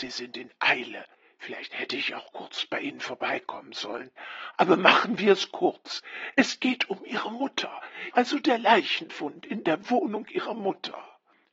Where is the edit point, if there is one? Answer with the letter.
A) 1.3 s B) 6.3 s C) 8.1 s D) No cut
C